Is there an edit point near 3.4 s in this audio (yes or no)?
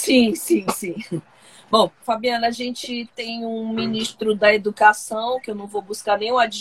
no